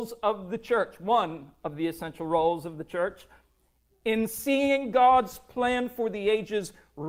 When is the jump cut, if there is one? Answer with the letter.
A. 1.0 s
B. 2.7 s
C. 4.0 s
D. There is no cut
D